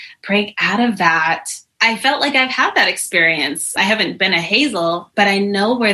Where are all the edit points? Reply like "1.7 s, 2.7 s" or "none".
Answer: 1.8 s